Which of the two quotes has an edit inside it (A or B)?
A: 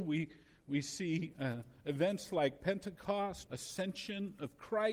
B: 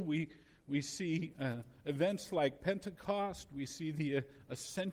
A